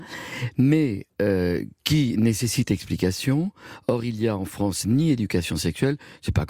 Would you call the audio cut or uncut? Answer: cut